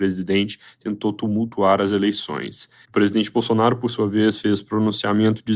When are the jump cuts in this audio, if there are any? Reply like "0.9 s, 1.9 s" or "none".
2.8 s